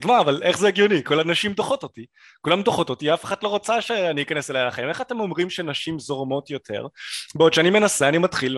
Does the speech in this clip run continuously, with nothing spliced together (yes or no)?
yes